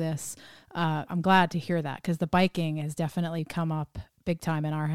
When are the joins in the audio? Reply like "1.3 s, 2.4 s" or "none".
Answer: 1.1 s